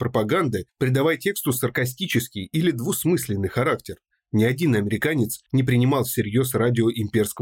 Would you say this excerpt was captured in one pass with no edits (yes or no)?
no